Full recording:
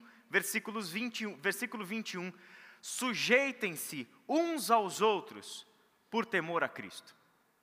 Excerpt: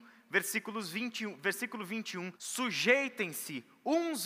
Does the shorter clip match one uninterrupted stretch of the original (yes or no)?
no